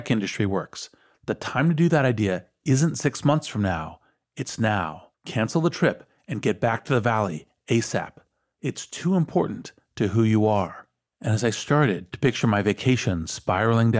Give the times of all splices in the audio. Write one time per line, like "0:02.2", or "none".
0:05.1